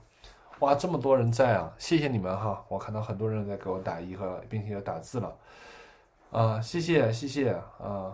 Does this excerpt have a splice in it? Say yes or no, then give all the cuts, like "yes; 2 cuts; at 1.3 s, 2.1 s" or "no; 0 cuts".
no; 0 cuts